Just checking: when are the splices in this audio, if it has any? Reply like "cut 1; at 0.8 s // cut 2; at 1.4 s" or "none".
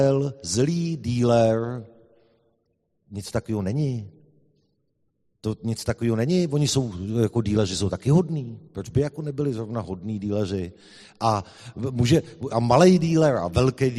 cut 1; at 12.5 s